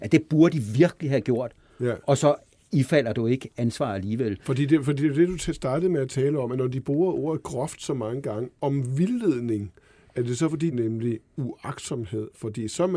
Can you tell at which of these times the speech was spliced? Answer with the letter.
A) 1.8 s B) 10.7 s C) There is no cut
B